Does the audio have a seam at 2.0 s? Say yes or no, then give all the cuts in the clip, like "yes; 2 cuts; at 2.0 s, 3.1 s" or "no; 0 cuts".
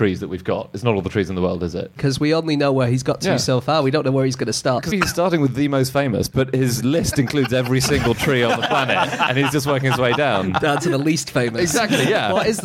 yes; 2 cuts; at 2.0 s, 4.9 s